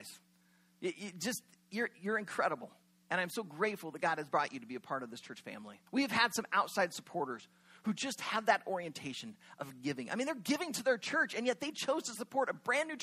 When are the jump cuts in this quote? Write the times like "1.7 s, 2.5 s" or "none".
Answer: 5.9 s